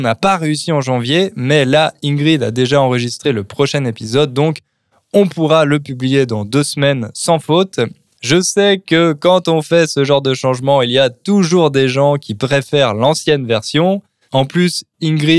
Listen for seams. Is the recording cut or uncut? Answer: cut